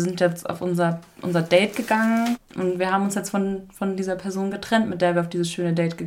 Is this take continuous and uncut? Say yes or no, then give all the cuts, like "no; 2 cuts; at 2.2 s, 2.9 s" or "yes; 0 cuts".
no; 1 cut; at 2.3 s